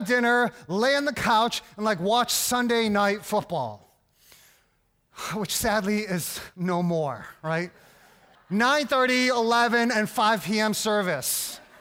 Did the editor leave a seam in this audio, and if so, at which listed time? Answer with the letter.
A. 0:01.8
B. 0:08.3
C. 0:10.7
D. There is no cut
B